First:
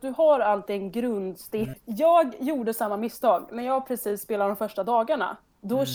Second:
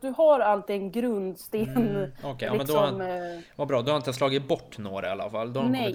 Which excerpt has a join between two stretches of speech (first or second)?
first